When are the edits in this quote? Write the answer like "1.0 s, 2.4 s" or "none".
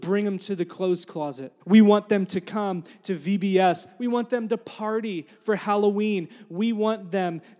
1.6 s